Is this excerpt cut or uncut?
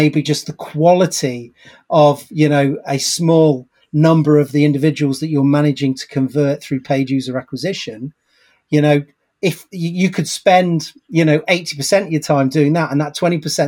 uncut